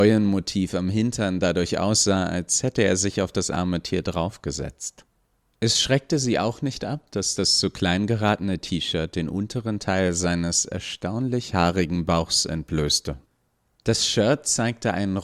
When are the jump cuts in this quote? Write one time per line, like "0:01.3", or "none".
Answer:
none